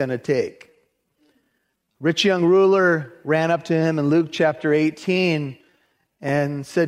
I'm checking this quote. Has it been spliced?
no; 0 cuts

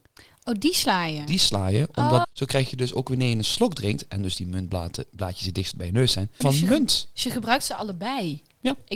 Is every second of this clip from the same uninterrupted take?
no; 2 cuts; at 2.2 s, 6.4 s

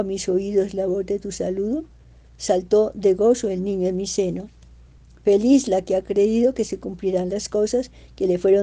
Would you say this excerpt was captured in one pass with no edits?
yes; 0 cuts

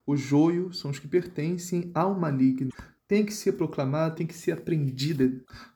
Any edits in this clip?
yes; 2 cuts; at 3.0 s, 4.2 s

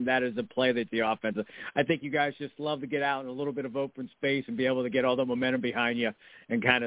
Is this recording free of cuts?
yes; 0 cuts

